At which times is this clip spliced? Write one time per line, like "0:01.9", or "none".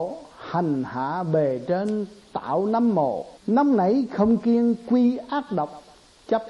0:03.4